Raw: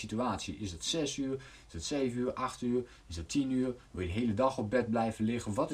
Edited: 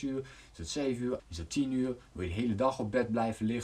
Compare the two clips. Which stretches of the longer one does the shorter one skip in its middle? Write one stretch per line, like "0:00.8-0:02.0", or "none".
0:02.3-0:03.0